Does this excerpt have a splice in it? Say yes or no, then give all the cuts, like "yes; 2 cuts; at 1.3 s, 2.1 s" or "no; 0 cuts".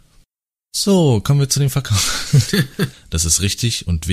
yes; 1 cut; at 2.9 s